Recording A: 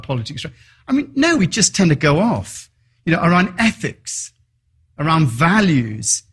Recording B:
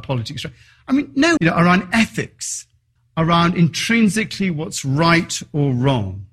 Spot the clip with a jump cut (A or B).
B